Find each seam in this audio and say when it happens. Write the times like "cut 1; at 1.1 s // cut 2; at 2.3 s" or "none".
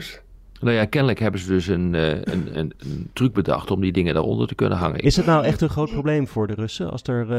cut 1; at 2.5 s // cut 2; at 5.0 s